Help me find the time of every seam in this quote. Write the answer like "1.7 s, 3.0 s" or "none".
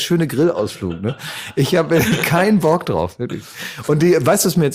none